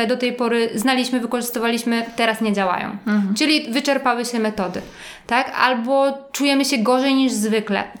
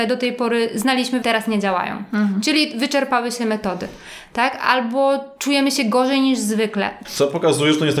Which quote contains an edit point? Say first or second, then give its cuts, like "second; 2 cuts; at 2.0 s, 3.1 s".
second; 2 cuts; at 1.2 s, 7.0 s